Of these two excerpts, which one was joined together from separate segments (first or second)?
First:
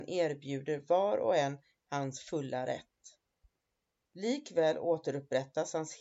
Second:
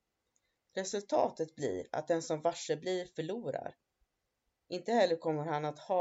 first